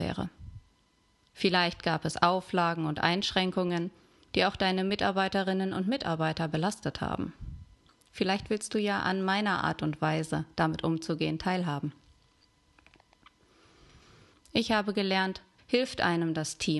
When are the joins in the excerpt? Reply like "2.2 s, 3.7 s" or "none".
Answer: 7.9 s, 14.3 s, 15.6 s